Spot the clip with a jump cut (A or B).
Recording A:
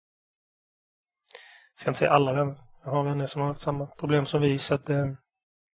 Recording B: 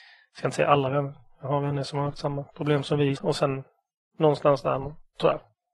B